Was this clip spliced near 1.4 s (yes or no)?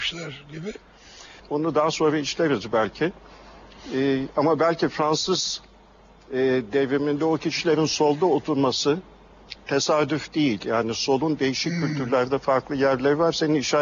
yes